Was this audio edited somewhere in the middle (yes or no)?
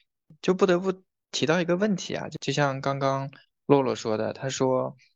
no